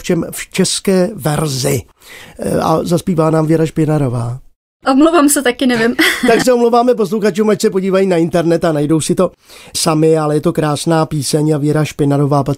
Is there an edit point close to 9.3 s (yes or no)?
no